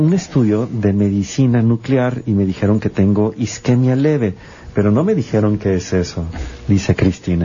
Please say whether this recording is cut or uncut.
uncut